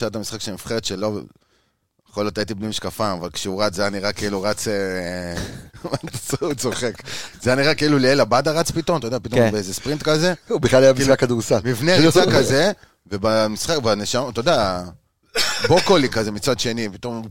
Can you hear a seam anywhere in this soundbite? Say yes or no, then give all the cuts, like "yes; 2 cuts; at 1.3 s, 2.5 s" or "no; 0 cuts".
no; 0 cuts